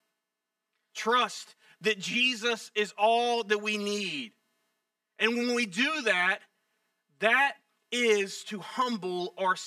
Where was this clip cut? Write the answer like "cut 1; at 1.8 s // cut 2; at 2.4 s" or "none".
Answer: none

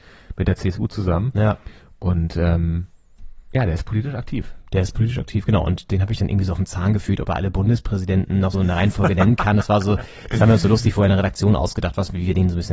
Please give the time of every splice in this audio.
cut 1; at 8.5 s

